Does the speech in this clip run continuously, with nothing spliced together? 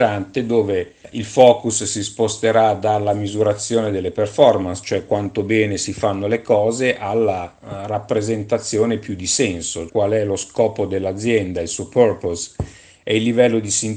no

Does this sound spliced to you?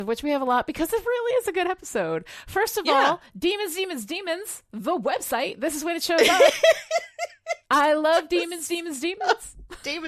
no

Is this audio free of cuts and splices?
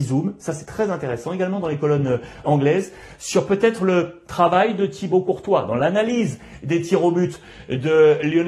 no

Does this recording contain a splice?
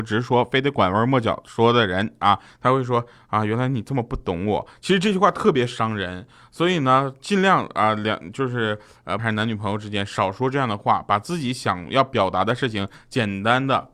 yes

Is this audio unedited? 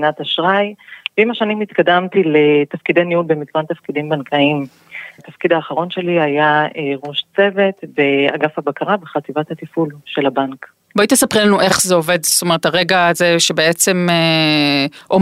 no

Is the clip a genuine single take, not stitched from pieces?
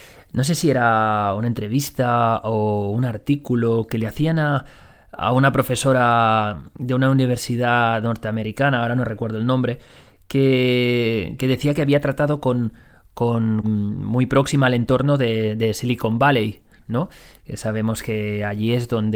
no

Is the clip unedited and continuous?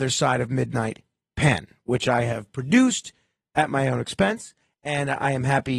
yes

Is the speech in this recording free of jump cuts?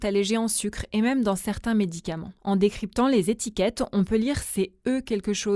yes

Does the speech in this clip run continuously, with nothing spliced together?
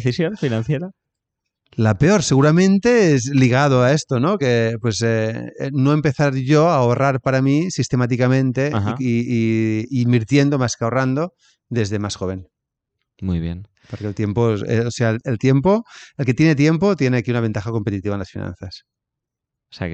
yes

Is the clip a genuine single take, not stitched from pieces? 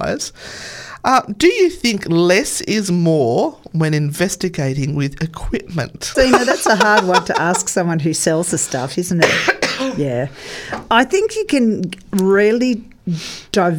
no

